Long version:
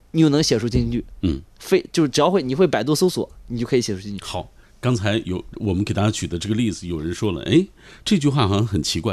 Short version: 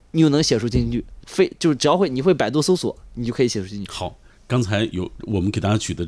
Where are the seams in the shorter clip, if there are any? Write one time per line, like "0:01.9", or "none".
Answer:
0:01.2